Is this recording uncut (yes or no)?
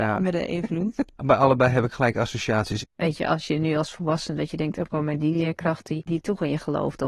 no